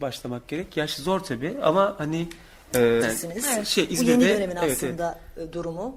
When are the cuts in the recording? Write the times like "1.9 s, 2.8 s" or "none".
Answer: 3.0 s